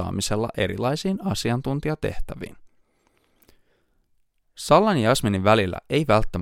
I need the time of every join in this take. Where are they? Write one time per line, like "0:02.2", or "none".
none

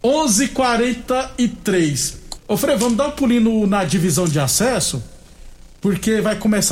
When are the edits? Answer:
0:02.4

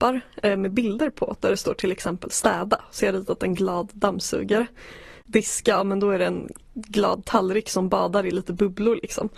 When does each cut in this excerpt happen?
none

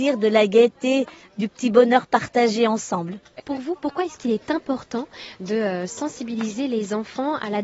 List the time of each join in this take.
0:03.4

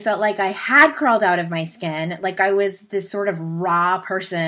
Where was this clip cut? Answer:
none

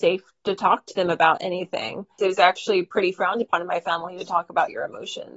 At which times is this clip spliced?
0:02.2

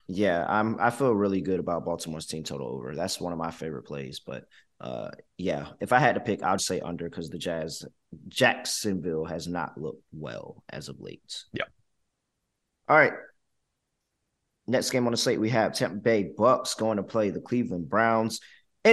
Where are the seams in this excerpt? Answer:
0:06.6
0:10.1

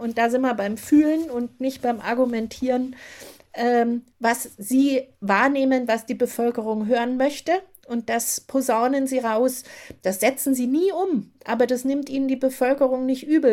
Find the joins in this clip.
none

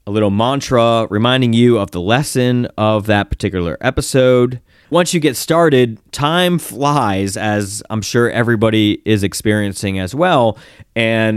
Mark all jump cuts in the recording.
0:04.8

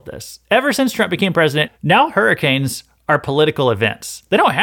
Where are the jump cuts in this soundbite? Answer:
0:01.7

